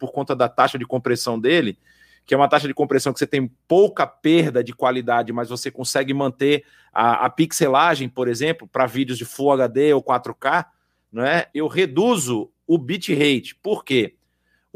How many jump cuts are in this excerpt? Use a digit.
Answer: 1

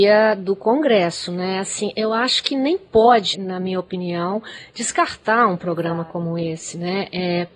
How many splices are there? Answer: 1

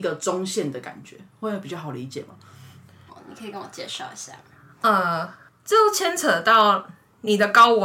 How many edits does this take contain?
1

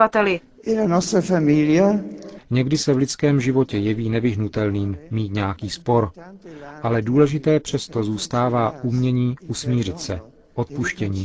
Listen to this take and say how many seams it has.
1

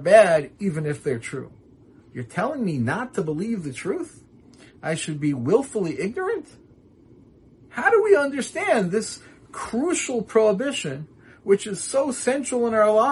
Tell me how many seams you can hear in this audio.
1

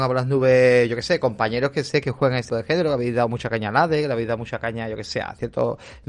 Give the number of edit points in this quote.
1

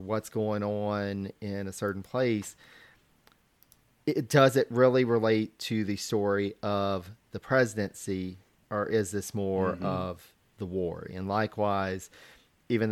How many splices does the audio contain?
1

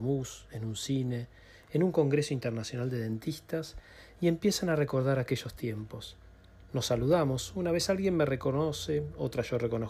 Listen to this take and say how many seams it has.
0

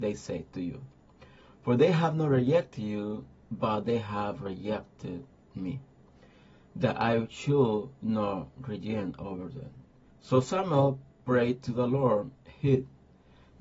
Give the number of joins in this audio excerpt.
2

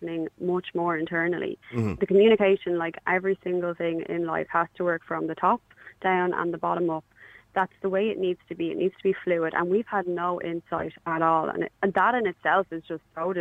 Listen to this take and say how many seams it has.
0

